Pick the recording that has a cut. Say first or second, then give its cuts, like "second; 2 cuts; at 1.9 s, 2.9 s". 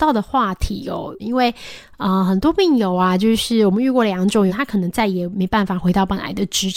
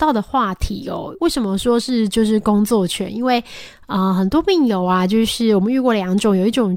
first; 2 cuts; at 1.2 s, 4.5 s